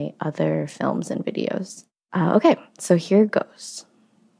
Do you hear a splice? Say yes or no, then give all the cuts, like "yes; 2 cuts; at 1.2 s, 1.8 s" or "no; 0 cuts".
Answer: no; 0 cuts